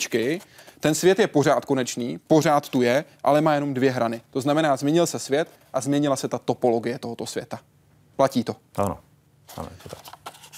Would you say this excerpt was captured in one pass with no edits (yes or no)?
yes